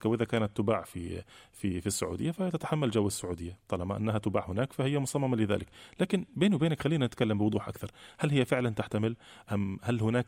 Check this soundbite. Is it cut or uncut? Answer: uncut